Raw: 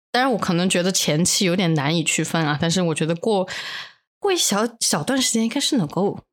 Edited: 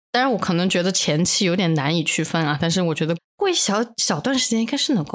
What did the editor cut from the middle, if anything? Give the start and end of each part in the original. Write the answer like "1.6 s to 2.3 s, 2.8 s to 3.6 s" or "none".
3.2 s to 4.0 s